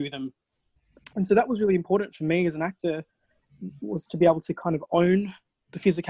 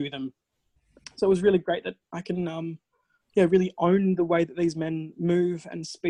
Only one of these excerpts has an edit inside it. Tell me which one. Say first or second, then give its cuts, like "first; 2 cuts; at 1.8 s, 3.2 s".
first; 1 cut; at 1.1 s